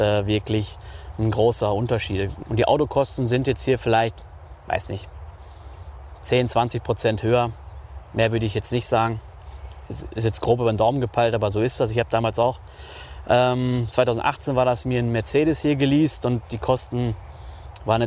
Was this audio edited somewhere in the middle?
yes; 1 cut; at 2.4 s

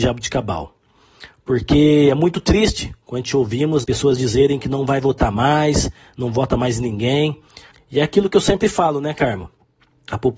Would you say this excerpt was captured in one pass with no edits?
no; 2 cuts; at 3.8 s, 7.7 s

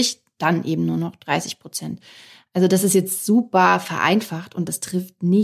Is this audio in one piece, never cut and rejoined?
yes; 0 cuts

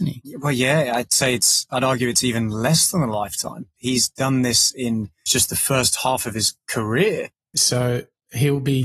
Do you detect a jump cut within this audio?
yes; 3 cuts; at 3.8 s, 5.3 s, 7.5 s

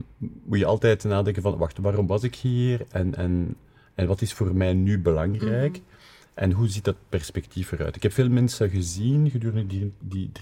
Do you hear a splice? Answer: no; 0 cuts

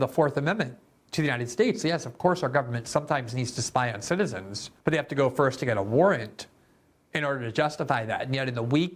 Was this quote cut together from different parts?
yes; 1 cut; at 4.8 s

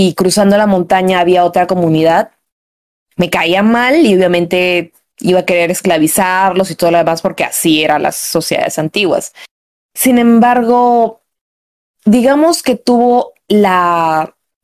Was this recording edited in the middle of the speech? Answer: no; 0 cuts

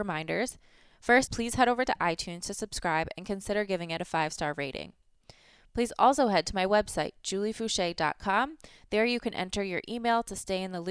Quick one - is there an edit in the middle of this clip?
yes; 1 cut; at 1.3 s

